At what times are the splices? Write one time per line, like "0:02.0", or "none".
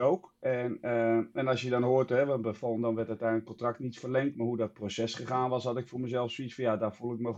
none